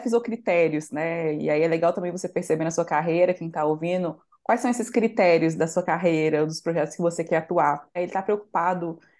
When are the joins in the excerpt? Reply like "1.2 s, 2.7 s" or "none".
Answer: 8.0 s